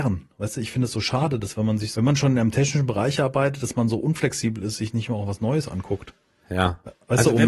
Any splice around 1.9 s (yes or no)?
yes